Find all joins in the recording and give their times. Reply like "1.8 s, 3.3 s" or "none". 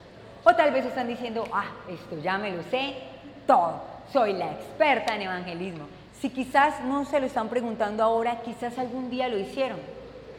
6.1 s